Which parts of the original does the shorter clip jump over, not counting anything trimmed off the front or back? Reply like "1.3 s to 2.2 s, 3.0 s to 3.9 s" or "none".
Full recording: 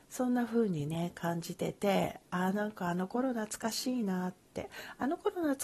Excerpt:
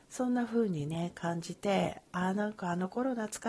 1.6 s to 1.7 s